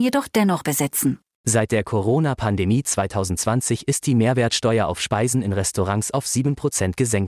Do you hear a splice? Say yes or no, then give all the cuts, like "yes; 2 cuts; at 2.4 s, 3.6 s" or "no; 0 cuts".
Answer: yes; 1 cut; at 1.4 s